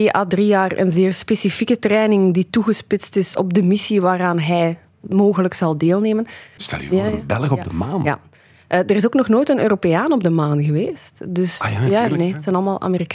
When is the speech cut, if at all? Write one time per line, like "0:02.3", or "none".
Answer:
0:06.6